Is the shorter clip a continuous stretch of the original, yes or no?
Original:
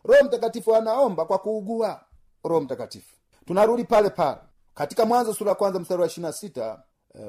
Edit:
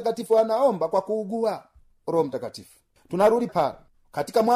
no